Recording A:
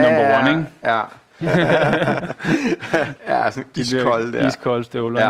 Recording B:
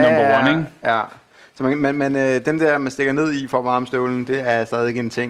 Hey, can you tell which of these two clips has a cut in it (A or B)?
A